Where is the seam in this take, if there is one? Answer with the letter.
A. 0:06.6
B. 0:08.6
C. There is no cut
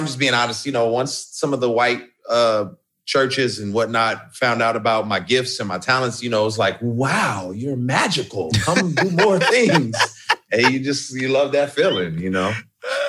C